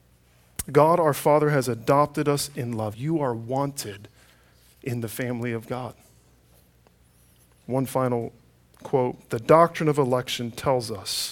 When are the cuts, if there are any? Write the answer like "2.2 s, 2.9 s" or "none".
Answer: 2.9 s, 7.6 s